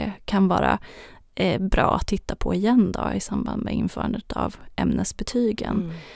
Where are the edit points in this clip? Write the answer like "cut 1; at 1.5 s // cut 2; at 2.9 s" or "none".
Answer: none